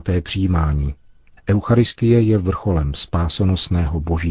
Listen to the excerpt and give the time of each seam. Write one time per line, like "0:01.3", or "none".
0:01.4